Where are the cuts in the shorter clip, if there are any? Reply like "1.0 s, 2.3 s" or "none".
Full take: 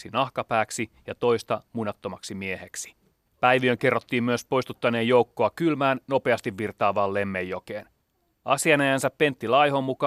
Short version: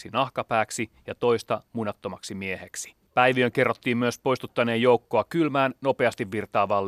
3.1 s